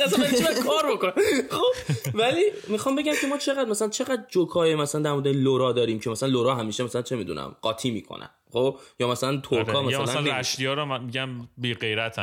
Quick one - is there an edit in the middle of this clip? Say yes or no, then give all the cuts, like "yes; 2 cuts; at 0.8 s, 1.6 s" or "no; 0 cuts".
no; 0 cuts